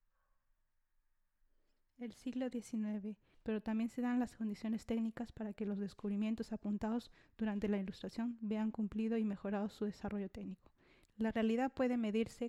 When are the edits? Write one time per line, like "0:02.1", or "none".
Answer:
0:03.3
0:11.0